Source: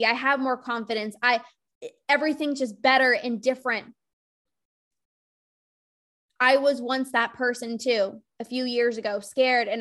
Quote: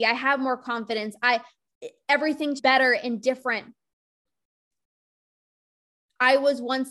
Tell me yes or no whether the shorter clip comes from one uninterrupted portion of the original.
no